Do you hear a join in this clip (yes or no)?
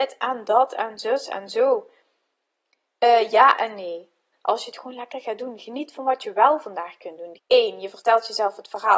yes